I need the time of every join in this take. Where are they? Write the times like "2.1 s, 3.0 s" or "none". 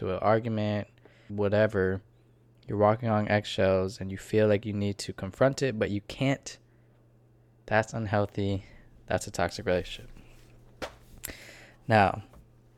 1.3 s

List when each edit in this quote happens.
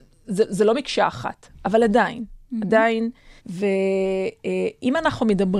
3.4 s

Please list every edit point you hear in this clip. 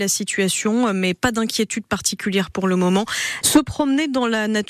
3.4 s

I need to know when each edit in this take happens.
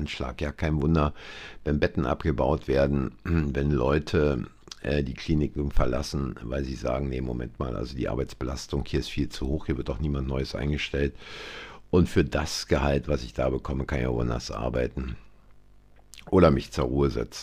none

